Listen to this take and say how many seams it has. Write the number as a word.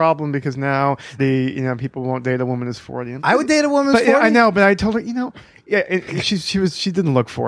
two